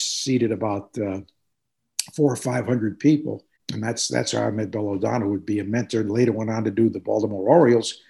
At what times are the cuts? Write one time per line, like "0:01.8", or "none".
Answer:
0:03.6